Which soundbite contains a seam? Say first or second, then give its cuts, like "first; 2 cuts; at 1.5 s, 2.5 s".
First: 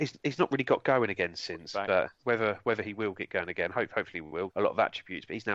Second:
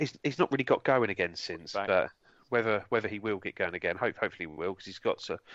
first; 2 cuts; at 2.2 s, 4.5 s